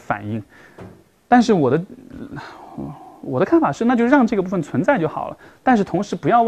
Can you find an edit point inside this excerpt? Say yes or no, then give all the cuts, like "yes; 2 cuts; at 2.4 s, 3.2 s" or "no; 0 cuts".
no; 0 cuts